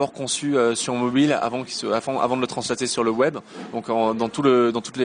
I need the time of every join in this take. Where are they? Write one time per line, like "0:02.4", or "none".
none